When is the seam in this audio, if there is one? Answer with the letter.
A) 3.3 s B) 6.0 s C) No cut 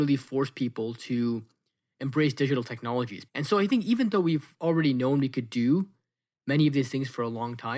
A